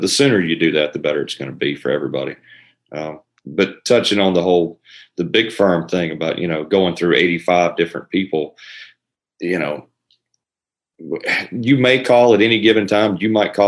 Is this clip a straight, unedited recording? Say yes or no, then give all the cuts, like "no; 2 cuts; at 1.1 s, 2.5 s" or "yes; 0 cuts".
yes; 0 cuts